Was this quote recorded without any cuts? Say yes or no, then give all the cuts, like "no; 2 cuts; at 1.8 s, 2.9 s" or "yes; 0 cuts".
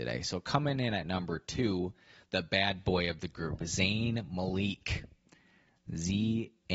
yes; 0 cuts